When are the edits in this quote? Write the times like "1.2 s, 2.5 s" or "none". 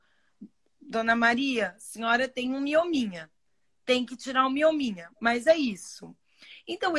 none

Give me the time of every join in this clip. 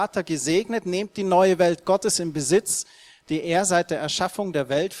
none

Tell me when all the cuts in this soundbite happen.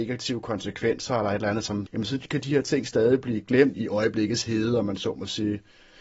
1.9 s, 3.7 s

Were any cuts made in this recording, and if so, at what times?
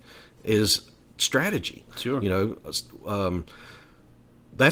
1.9 s

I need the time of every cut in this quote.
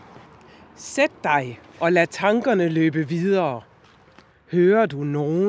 4.3 s

